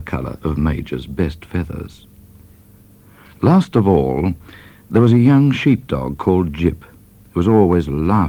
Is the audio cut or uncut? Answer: uncut